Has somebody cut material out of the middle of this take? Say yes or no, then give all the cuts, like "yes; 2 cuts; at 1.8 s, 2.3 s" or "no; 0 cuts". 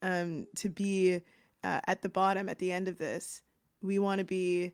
no; 0 cuts